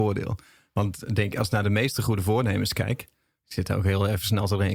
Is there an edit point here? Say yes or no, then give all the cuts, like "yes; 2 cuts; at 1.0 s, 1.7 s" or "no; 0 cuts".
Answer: no; 0 cuts